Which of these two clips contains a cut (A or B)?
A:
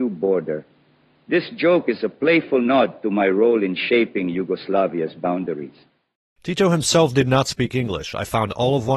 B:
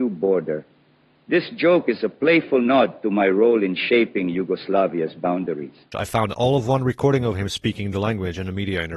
B